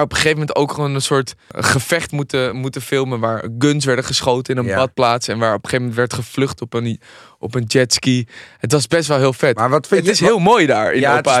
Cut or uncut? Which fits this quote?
uncut